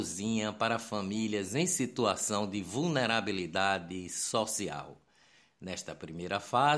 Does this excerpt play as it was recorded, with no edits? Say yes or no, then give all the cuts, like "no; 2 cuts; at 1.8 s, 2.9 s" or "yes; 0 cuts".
yes; 0 cuts